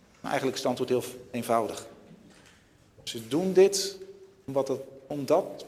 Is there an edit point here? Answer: no; 0 cuts

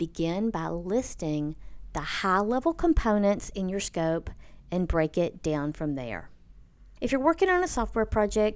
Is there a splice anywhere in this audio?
yes; 1 cut; at 7.0 s

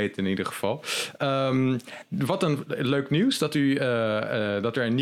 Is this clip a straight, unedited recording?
yes; 0 cuts

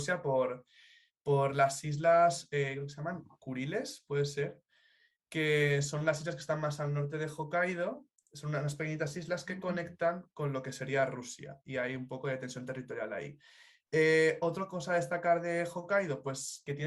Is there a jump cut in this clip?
no; 0 cuts

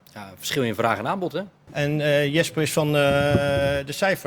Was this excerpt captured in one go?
no; 1 cut; at 1.7 s

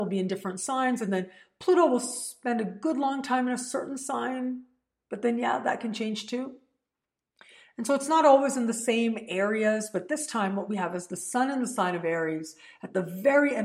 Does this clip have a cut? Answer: no; 0 cuts

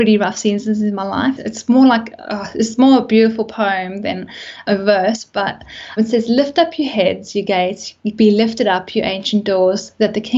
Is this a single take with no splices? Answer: no; 2 cuts; at 1.4 s, 6.0 s

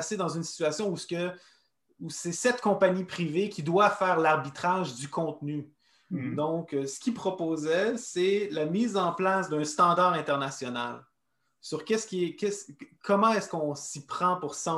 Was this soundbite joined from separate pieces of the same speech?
no; 0 cuts

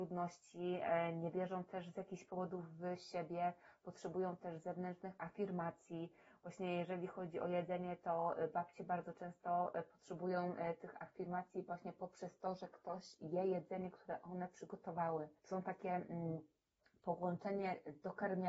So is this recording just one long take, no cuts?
no; 1 cut; at 15.4 s

